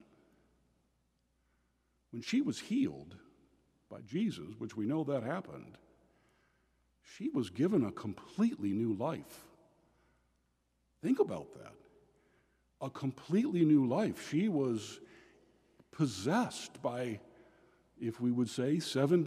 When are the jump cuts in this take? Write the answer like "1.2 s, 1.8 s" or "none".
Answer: none